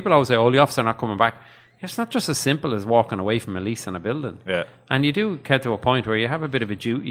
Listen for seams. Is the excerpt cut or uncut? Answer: uncut